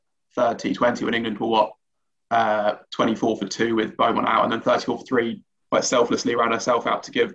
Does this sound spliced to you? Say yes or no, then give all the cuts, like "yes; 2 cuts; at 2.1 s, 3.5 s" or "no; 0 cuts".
yes; 1 cut; at 5.6 s